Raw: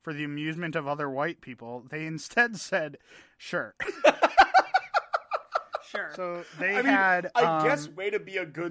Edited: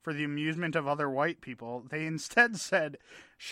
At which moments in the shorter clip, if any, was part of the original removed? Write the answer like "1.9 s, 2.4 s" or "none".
none